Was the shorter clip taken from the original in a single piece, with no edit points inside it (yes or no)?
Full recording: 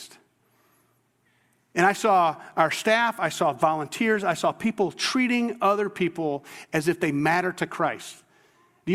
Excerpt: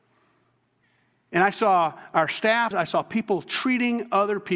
no